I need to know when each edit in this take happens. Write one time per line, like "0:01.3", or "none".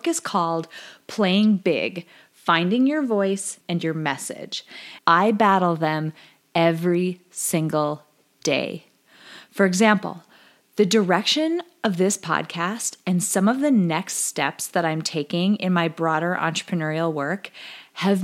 0:03.6
0:05.0